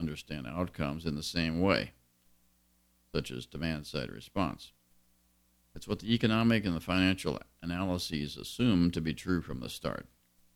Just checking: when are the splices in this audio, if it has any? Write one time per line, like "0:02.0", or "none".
0:05.6